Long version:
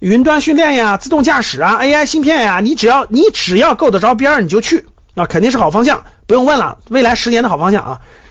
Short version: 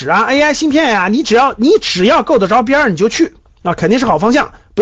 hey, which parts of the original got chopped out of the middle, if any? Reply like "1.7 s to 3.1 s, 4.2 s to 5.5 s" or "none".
none